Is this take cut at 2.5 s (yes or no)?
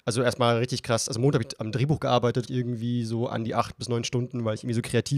yes